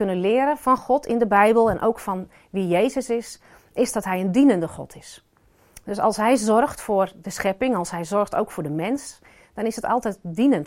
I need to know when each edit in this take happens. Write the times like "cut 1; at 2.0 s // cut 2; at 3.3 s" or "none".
none

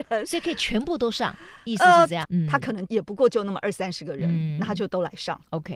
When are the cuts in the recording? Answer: cut 1; at 2.2 s

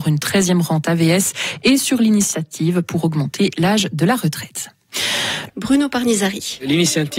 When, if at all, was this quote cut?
cut 1; at 5.5 s

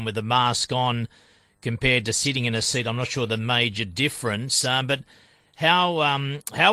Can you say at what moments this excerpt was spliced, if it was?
none

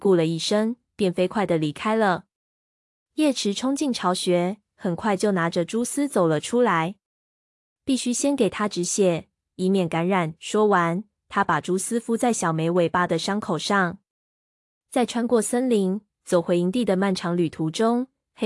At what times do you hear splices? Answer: cut 1; at 9.4 s

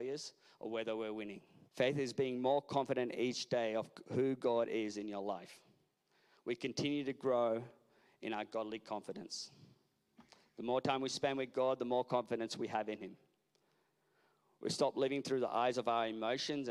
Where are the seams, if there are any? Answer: cut 1; at 1.7 s

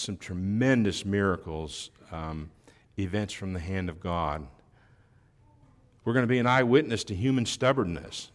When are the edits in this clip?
none

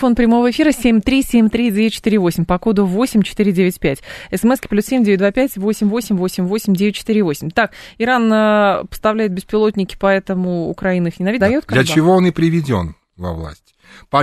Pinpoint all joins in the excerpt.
cut 1; at 11.4 s

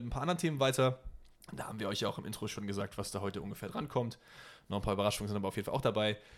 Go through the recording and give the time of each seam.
none

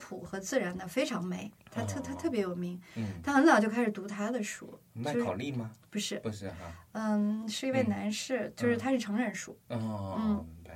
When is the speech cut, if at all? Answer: none

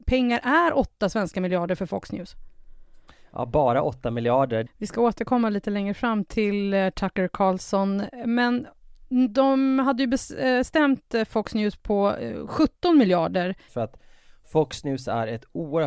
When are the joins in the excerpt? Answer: cut 1; at 4.7 s // cut 2; at 13.7 s

